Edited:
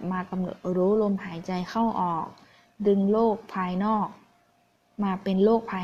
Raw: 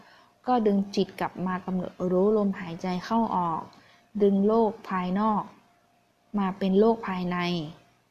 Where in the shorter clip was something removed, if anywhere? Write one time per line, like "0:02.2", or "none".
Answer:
none